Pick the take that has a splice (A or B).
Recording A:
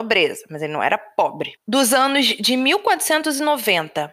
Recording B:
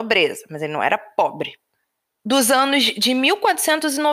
A